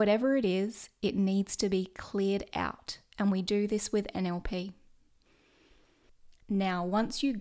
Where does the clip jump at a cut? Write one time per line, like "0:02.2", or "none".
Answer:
0:06.4